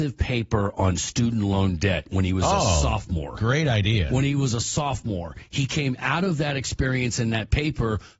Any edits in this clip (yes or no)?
no